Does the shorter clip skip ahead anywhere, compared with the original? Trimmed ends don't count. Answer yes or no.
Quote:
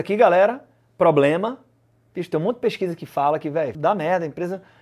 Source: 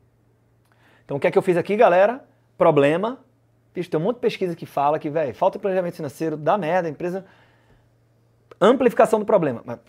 yes